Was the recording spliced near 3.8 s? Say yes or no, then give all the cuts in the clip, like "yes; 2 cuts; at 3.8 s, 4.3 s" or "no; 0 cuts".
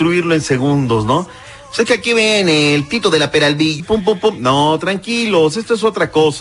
yes; 1 cut; at 3.8 s